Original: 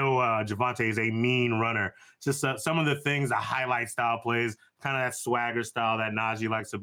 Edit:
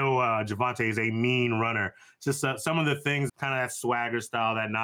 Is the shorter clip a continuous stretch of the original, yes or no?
no